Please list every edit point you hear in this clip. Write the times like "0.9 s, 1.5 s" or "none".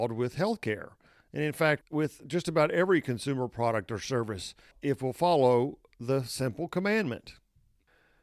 1.8 s, 4.7 s